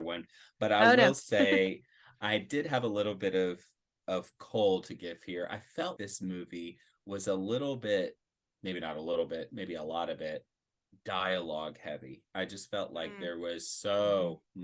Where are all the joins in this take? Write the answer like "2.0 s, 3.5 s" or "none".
6.0 s